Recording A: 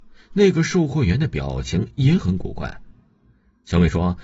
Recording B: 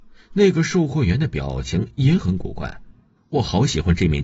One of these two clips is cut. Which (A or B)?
B